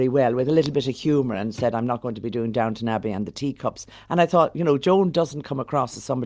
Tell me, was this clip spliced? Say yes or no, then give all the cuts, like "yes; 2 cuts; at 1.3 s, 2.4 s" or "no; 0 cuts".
no; 0 cuts